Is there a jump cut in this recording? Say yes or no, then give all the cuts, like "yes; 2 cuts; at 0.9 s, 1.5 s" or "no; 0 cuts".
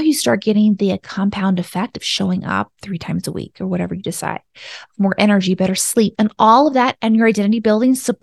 yes; 1 cut; at 6.1 s